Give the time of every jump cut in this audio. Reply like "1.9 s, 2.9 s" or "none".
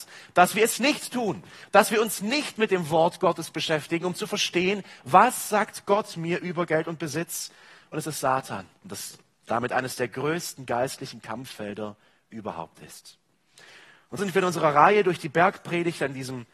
8.8 s, 14.2 s